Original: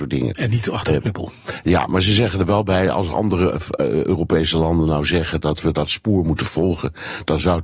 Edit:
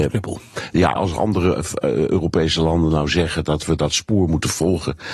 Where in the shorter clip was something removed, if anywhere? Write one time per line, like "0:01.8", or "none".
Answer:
0:01.0